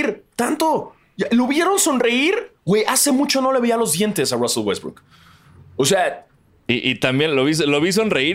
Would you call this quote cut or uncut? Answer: uncut